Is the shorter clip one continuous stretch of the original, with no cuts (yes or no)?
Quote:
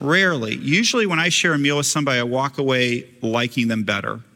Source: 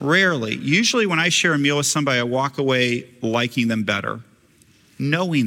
yes